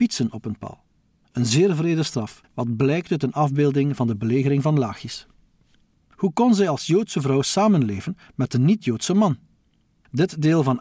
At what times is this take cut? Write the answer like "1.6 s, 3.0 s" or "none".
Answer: 2.5 s, 5.9 s